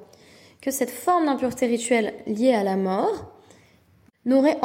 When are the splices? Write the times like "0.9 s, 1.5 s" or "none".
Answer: none